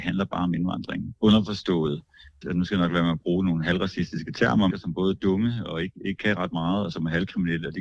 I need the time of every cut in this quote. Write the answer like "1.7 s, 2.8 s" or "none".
2.4 s, 4.7 s